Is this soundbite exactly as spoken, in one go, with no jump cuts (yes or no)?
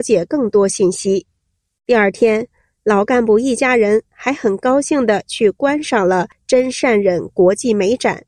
yes